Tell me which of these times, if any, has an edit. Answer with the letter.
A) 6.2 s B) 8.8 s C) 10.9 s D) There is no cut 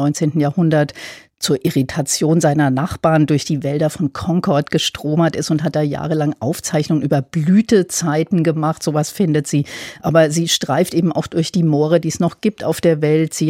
D